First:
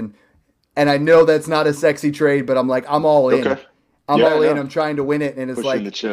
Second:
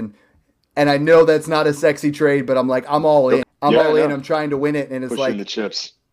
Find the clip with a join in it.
second; 1 cut; at 3.4 s

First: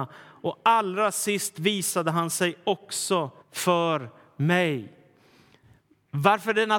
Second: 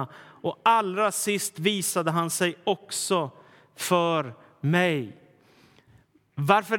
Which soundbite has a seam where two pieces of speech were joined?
first; 1 cut; at 3.4 s

